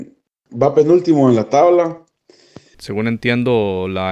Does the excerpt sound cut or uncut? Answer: cut